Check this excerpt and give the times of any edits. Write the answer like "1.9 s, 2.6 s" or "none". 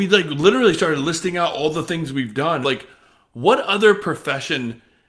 2.6 s